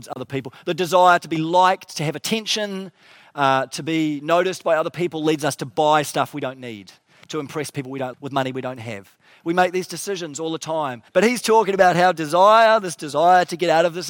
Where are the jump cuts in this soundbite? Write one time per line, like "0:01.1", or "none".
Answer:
0:08.1
0:11.1